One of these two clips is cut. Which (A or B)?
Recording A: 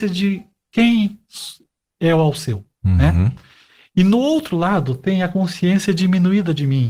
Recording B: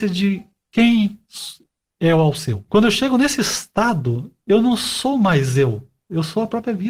B